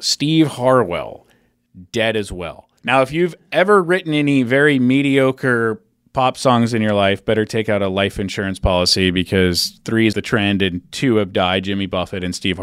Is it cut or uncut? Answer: cut